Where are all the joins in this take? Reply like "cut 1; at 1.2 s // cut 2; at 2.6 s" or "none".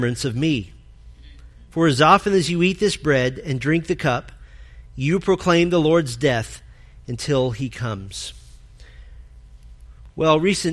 none